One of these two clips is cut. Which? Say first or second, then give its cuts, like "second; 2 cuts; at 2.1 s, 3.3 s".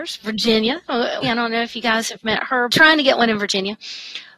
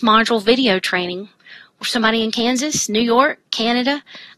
first; 2 cuts; at 1.2 s, 2.7 s